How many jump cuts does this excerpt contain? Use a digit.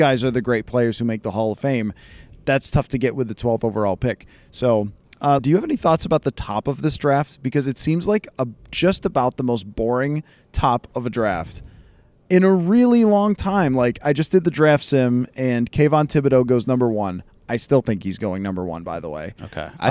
1